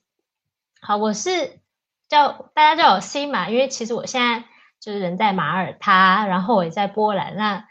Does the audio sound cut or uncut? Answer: uncut